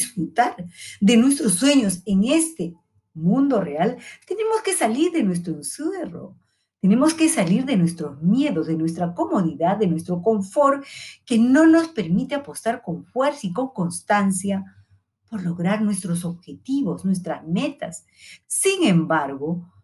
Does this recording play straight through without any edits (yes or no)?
no